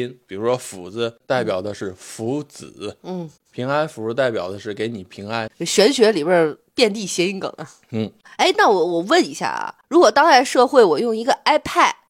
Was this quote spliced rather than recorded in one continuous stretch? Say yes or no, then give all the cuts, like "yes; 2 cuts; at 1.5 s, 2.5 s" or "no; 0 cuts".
no; 0 cuts